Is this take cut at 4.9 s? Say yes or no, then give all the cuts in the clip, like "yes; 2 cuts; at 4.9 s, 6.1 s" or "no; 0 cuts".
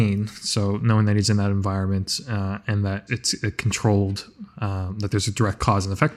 no; 1 cut; at 3.1 s